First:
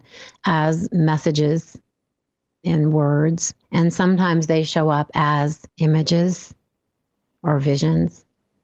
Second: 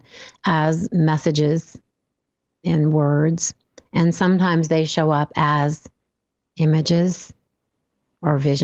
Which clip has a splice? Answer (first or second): first